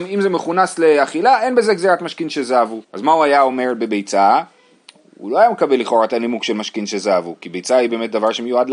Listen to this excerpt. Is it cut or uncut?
cut